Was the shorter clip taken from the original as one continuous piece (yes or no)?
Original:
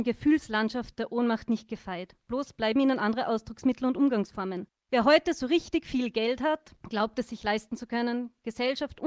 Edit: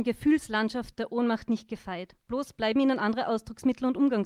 yes